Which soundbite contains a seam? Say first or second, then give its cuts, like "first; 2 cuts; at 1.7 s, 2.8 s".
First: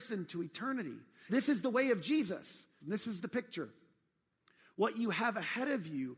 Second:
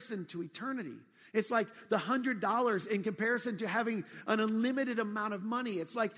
first; 2 cuts; at 1.3 s, 2.8 s